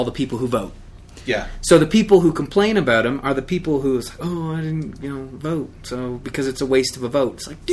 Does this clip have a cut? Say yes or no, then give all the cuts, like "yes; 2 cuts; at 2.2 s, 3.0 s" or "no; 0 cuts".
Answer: no; 0 cuts